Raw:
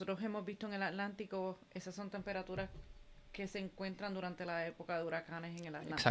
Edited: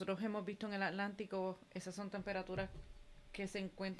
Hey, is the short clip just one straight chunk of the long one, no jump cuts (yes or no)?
yes